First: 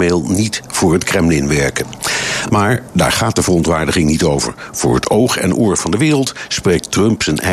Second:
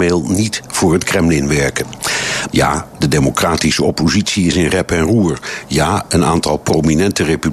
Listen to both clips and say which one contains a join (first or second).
second